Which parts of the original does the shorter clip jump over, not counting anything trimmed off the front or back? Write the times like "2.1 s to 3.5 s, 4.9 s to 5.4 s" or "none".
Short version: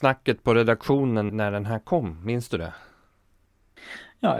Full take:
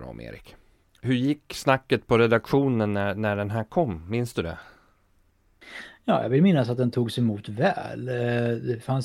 2.9 s to 3.1 s